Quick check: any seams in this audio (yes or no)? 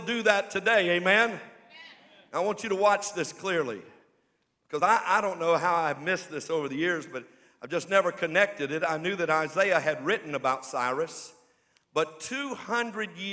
no